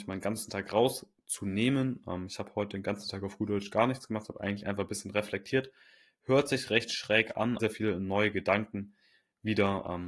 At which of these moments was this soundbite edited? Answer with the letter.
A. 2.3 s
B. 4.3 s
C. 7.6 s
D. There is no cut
C